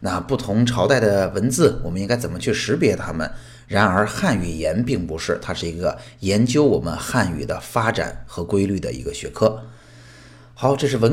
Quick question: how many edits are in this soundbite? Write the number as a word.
one